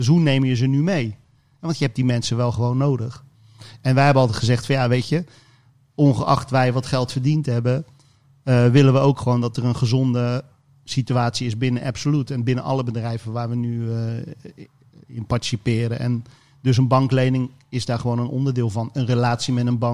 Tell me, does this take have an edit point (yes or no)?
no